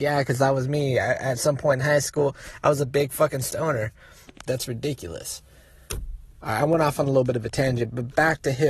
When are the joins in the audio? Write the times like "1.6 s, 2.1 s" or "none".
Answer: 4.5 s